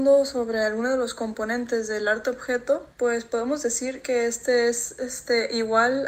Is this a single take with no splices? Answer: no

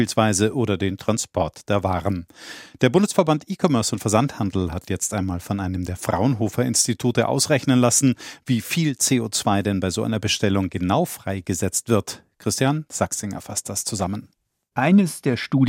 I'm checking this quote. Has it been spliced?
no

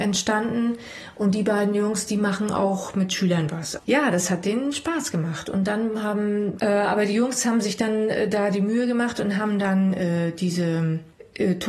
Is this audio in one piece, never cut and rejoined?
no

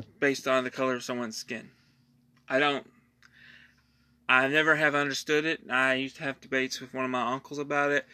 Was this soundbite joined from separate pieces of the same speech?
no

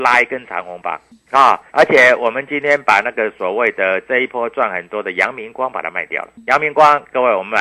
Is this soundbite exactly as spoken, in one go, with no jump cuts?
no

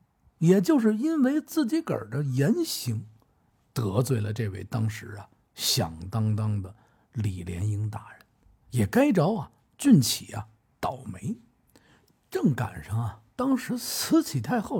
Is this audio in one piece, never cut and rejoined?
yes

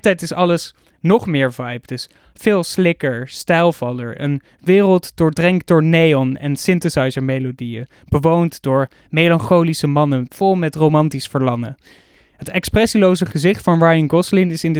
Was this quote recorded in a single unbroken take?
yes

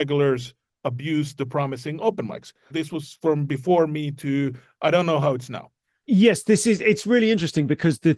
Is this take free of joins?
no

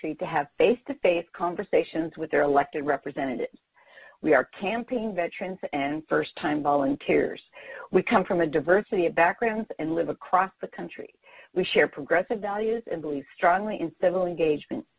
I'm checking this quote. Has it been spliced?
no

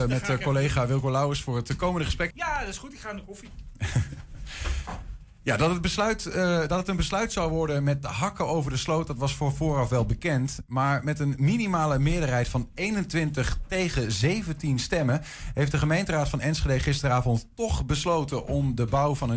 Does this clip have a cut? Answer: yes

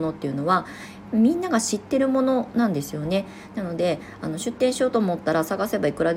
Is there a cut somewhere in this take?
yes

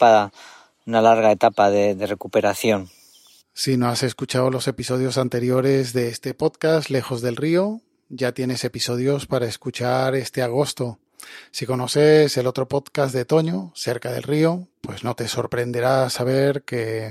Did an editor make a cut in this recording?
no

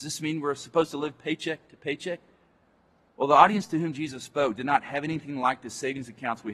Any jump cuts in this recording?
no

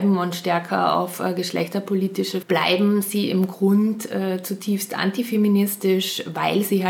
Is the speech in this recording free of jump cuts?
no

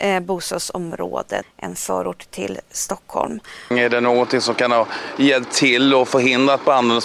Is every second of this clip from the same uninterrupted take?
no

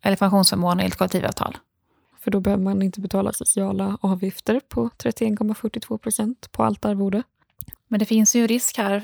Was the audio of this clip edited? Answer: yes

